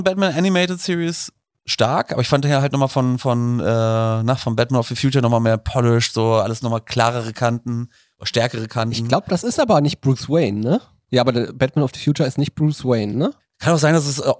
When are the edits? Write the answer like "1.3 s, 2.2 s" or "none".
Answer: 11.1 s, 13.4 s